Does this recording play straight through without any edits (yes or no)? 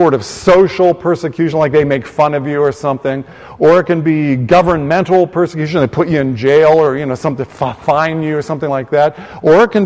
yes